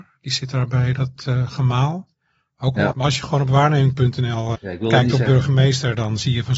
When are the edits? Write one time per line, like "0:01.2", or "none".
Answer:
0:02.9
0:04.5